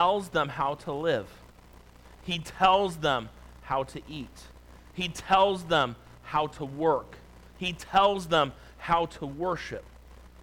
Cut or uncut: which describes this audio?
uncut